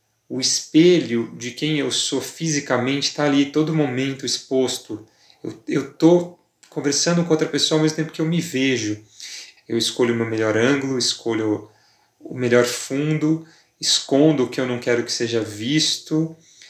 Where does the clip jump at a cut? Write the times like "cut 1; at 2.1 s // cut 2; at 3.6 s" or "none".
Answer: cut 1; at 9.6 s